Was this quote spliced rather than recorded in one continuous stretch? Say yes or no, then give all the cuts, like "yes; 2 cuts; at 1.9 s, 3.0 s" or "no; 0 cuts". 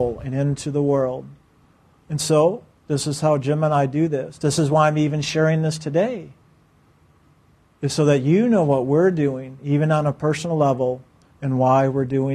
no; 0 cuts